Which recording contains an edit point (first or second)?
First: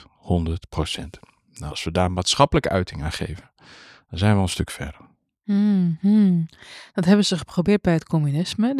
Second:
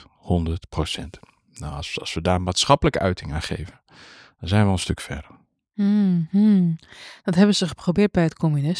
first